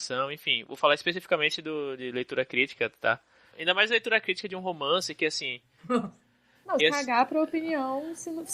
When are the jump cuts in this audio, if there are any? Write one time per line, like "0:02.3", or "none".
0:03.5
0:05.8
0:06.8